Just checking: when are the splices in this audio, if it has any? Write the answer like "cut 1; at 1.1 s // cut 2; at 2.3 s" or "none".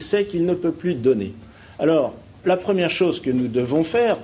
cut 1; at 2.4 s